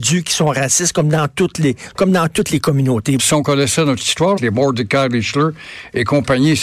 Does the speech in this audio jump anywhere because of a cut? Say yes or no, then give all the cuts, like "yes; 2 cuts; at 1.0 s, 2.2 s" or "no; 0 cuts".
yes; 2 cuts; at 3.2 s, 4.4 s